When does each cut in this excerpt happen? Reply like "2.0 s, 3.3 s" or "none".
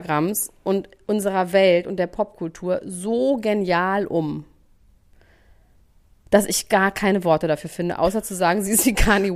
none